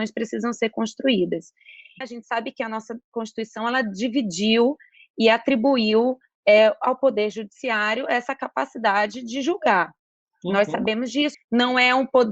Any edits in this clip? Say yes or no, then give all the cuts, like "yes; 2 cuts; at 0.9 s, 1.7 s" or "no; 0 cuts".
yes; 2 cuts; at 2.0 s, 11.3 s